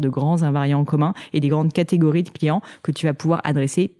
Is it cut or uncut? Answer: uncut